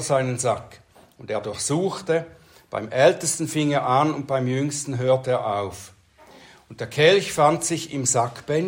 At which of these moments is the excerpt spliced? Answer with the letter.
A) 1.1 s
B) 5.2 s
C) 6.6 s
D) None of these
D